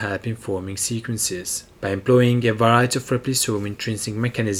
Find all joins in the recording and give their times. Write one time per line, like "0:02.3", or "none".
0:01.7